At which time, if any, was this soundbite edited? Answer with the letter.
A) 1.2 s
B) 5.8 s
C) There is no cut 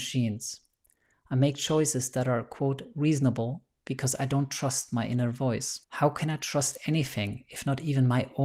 B